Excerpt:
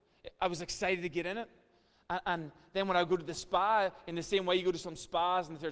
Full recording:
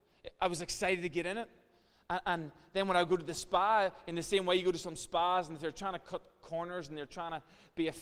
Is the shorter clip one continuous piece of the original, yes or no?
yes